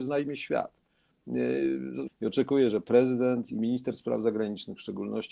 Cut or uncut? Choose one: cut